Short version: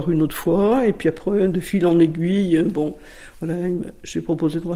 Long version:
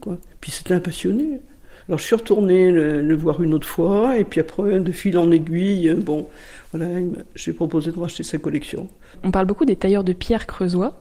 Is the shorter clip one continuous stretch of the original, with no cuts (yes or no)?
yes